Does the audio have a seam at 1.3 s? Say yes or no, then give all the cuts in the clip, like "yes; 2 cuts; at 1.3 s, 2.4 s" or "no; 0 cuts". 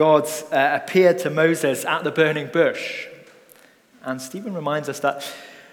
no; 1 cut; at 3.9 s